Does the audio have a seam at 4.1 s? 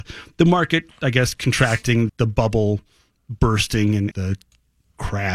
yes; 2 cuts; at 2.1 s, 4.1 s

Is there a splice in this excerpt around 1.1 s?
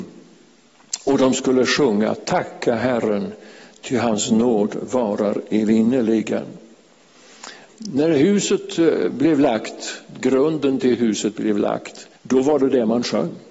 no; 2 cuts; at 7.7 s, 12.1 s

